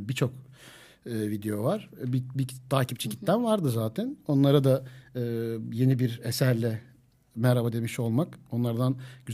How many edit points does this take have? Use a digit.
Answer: 0